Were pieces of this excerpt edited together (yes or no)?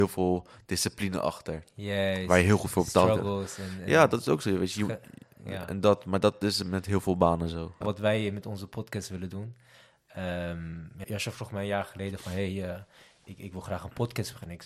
yes